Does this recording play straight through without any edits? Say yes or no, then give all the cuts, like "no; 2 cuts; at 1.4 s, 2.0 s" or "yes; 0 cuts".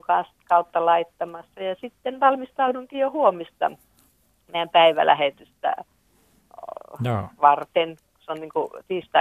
yes; 0 cuts